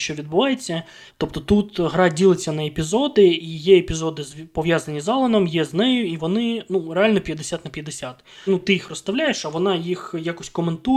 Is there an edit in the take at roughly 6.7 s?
no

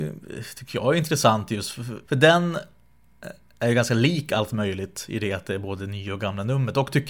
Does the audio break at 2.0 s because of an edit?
yes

